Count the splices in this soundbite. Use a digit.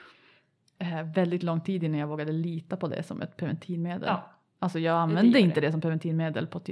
0